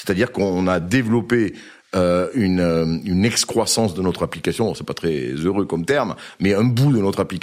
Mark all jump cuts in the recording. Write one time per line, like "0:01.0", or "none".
none